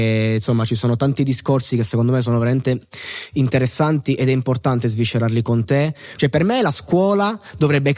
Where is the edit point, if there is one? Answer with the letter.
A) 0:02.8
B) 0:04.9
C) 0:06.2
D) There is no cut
C